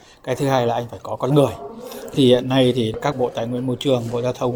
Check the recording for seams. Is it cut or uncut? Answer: cut